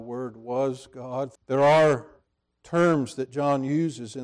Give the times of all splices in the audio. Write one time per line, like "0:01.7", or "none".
0:01.4